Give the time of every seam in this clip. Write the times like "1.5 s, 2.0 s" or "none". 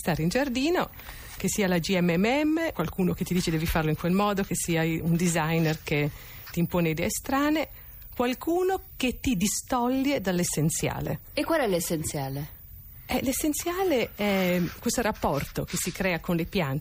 1.4 s, 2.7 s